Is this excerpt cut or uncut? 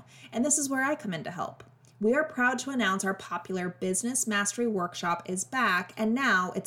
uncut